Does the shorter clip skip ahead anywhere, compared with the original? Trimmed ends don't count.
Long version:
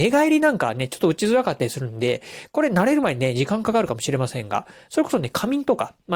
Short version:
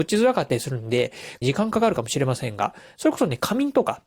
yes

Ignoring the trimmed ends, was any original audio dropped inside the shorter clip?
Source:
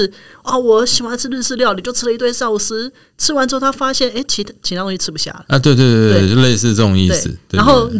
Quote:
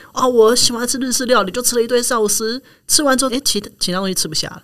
yes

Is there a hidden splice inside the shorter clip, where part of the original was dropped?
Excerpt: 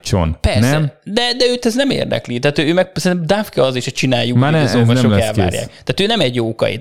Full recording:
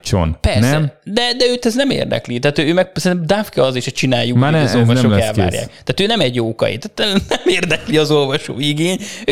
no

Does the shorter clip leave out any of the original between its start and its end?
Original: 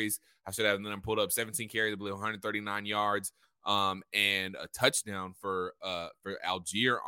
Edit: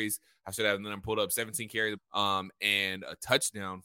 yes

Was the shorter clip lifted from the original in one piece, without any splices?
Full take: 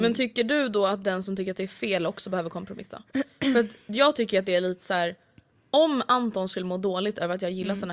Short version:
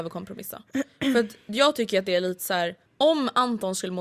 no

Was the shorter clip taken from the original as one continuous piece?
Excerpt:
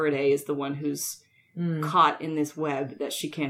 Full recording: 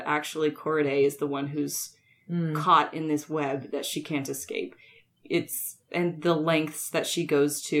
yes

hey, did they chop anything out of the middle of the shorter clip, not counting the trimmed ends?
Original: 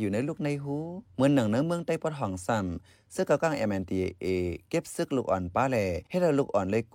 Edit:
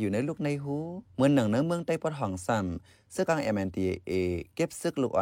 yes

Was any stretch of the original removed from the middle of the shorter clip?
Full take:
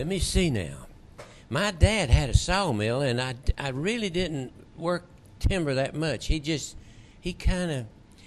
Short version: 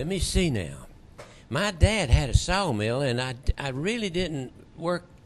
no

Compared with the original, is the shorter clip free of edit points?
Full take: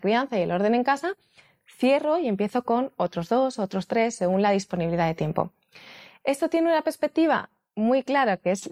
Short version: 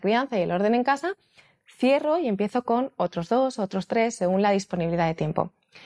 yes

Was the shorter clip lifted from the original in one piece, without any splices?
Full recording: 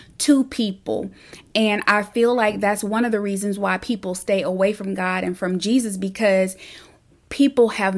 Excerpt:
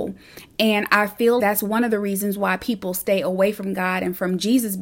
no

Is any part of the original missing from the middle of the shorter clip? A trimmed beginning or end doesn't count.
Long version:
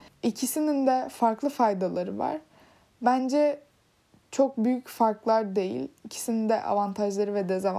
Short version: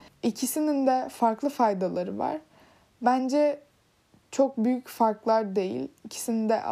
no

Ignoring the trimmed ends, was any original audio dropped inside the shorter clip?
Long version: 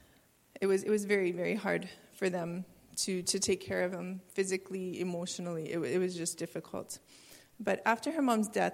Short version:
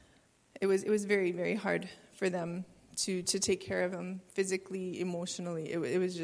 no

